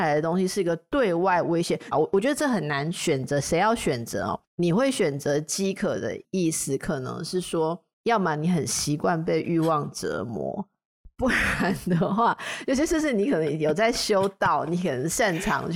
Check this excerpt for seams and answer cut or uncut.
cut